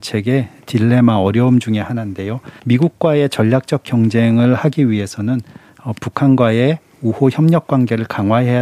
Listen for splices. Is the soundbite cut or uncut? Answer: cut